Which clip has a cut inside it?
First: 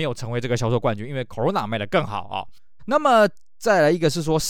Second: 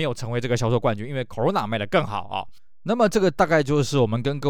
first; 1 cut; at 2.8 s

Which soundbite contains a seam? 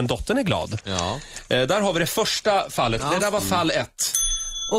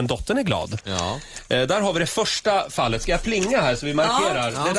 first; 1 cut; at 3.0 s

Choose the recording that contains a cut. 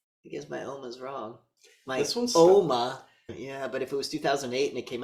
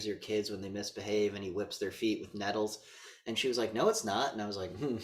first; 1 cut; at 3.3 s

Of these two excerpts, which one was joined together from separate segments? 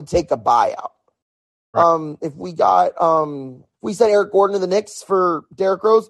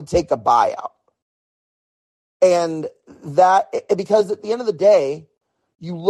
first; 2 cuts; at 1.7 s, 3.7 s

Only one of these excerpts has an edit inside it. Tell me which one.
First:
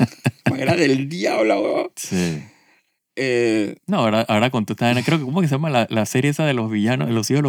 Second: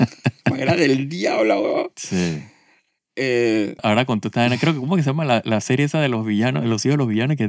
second; 1 cut; at 3.8 s

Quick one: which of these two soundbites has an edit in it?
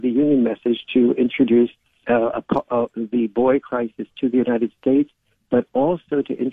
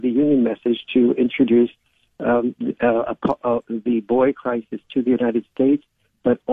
first; 1 cut; at 2.0 s

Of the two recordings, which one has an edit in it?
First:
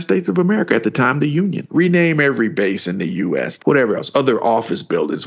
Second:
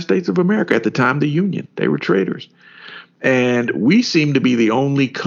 first; 2 cuts; at 1.7 s, 3.6 s

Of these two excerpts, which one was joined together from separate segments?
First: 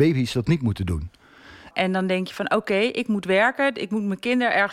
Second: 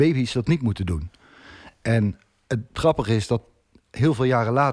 first; 1 cut; at 1.7 s

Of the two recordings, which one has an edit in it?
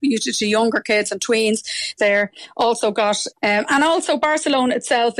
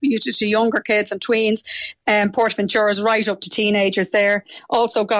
first; 2 cuts; at 2.0 s, 3.3 s

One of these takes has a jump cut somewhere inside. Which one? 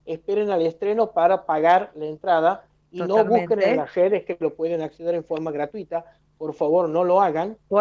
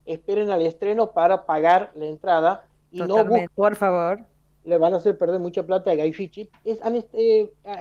second; 2 cuts; at 3.5 s, 6.5 s

